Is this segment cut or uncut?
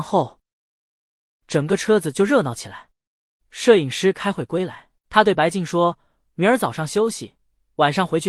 cut